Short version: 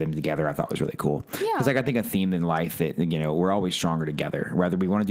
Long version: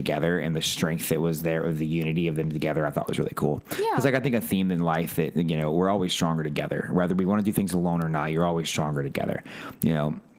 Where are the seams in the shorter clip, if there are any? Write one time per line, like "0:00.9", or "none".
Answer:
none